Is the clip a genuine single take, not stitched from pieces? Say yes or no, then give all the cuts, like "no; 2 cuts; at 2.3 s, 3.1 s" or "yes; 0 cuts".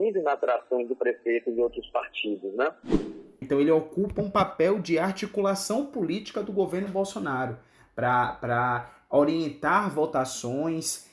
no; 1 cut; at 3.4 s